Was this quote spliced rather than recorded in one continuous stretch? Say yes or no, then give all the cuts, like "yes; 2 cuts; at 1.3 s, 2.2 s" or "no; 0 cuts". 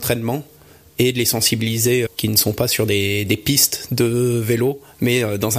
yes; 1 cut; at 2.1 s